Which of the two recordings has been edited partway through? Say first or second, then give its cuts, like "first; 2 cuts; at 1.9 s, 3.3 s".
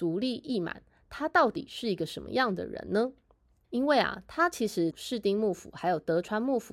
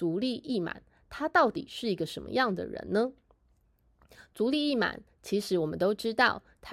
first; 2 cuts; at 3.6 s, 4.9 s